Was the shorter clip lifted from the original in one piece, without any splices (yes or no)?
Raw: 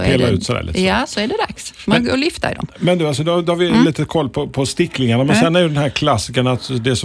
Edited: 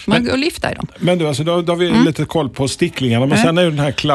no